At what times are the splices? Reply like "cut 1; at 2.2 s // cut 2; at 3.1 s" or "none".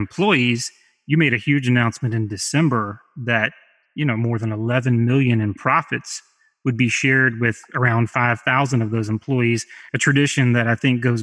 none